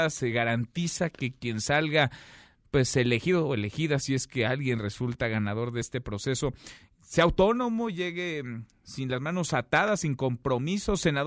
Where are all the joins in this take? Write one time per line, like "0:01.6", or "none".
none